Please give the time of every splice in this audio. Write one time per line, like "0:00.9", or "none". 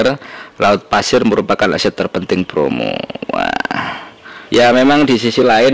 0:04.5